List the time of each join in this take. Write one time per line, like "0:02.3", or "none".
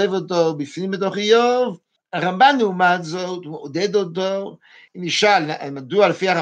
0:02.0
0:04.9